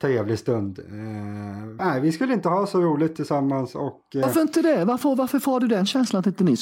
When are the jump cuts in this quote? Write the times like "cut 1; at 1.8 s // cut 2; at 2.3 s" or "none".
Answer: cut 1; at 1.8 s